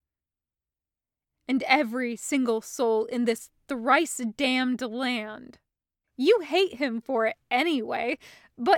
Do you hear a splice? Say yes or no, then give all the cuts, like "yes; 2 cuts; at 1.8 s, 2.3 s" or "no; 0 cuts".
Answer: yes; 1 cut; at 6.0 s